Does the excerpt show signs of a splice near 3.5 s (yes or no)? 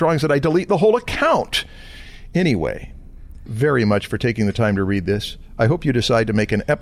yes